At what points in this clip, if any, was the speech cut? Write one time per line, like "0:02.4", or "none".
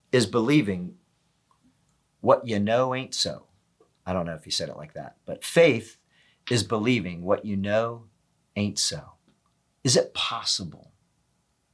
0:09.8